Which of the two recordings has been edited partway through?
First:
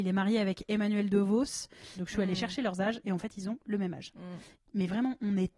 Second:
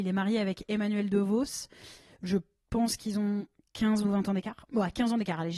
first; 2 cuts; at 2.0 s, 4.5 s

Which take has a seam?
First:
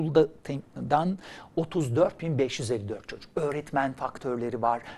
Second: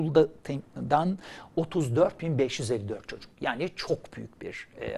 first; 1 cut; at 3.3 s

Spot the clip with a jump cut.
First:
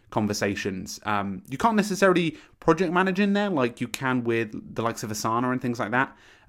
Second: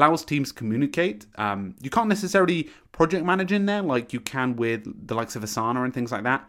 second; 1 cut; at 1.3 s

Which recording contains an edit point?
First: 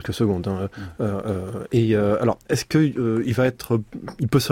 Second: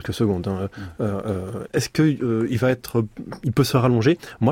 second; 1 cut; at 1.7 s

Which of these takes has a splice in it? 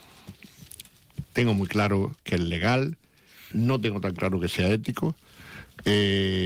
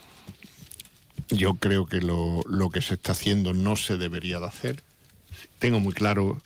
first; 2 cuts; at 1.2 s, 3.5 s

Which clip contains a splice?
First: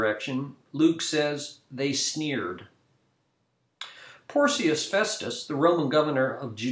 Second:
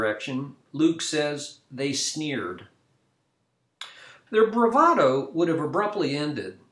second; 1 cut; at 4.3 s

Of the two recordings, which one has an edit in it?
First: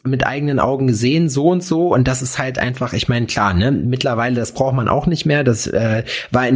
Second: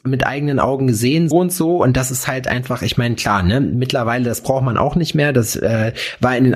second; 1 cut; at 1.3 s

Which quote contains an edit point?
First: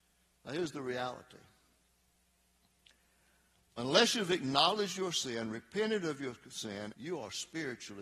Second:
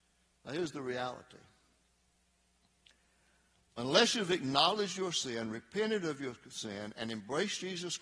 first; 1 cut; at 6.9 s

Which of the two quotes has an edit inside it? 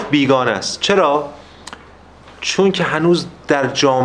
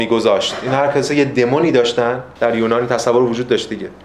second; 1 cut; at 2.4 s

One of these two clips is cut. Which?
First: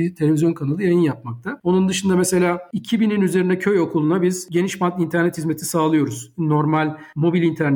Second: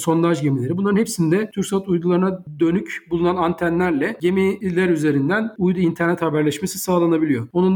first; 1 cut; at 1.6 s

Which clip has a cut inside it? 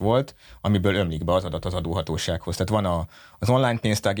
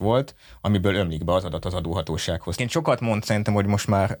second; 1 cut; at 2.6 s

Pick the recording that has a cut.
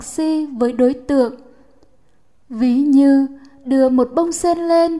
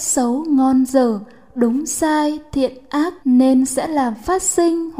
second; 1 cut; at 3.2 s

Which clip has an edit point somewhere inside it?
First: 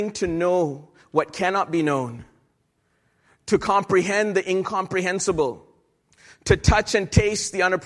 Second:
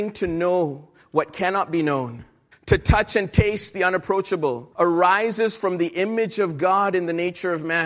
second; 2 cuts; at 2.5 s, 4.7 s

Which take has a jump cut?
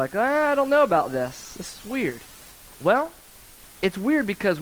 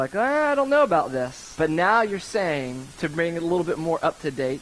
second; 1 cut; at 1.6 s

